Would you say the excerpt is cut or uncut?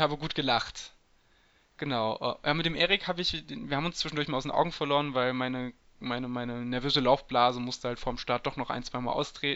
uncut